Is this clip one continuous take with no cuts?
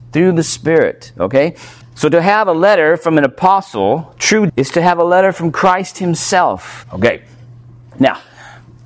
no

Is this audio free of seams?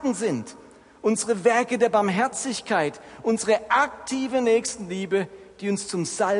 yes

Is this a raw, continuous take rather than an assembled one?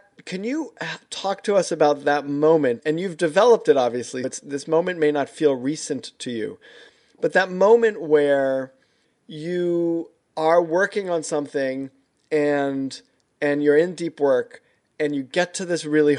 no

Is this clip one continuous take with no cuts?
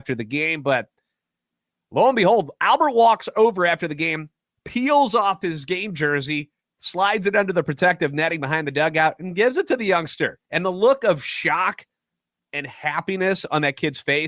no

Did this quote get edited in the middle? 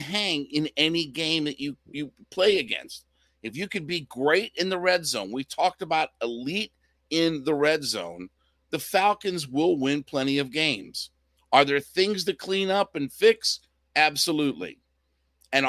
no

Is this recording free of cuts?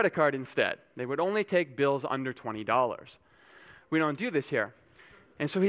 no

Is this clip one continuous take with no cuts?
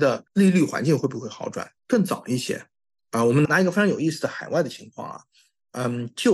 no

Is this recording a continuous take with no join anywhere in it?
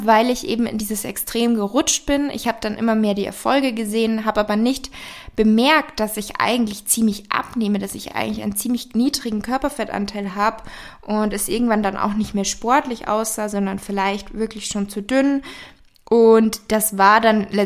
yes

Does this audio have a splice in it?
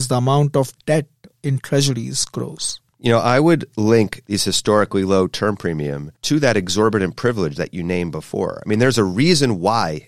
no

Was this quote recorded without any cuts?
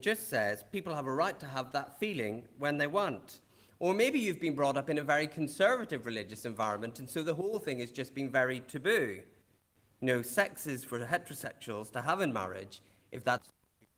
yes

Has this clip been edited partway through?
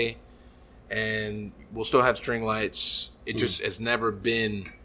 yes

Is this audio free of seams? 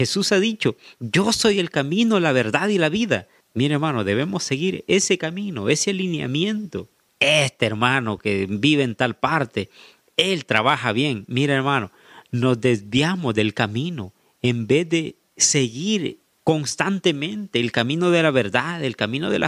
no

